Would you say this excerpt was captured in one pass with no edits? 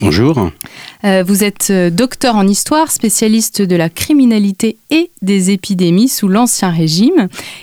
yes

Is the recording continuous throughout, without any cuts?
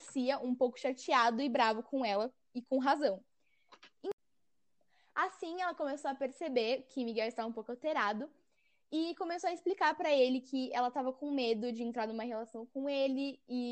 yes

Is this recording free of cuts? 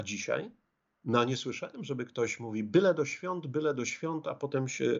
yes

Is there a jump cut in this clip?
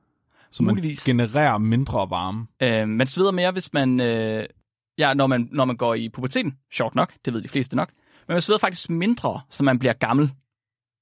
yes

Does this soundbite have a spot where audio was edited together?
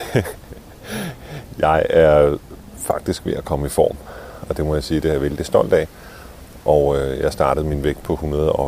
no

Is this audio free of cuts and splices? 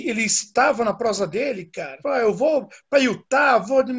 no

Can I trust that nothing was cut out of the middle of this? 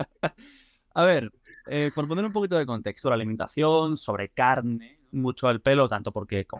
no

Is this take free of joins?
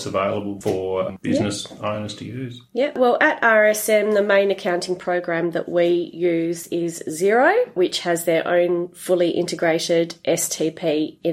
yes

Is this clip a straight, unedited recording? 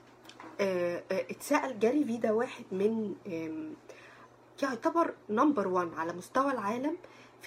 yes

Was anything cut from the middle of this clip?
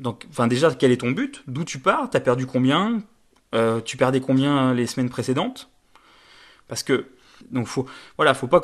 yes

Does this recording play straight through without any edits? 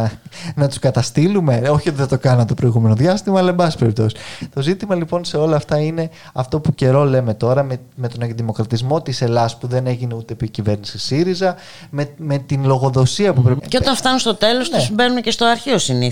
no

